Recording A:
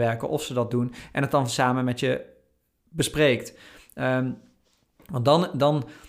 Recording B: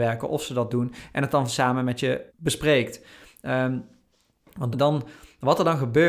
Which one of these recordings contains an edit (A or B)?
B